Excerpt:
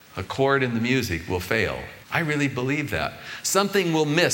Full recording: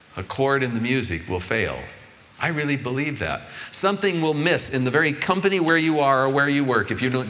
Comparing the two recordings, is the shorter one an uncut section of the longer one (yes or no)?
no